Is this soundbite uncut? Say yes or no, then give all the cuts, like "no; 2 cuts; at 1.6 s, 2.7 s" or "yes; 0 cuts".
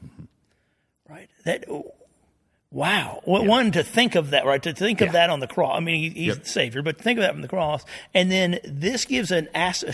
yes; 0 cuts